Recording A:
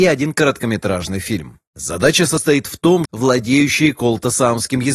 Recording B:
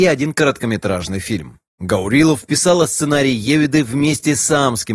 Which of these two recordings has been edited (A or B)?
A